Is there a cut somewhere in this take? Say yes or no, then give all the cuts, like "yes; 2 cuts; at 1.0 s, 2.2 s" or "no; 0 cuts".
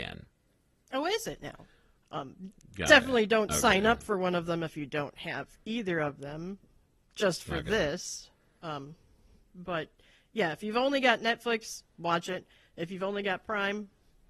yes; 1 cut; at 2.0 s